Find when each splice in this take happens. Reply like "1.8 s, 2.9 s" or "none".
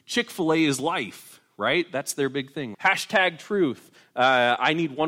2.7 s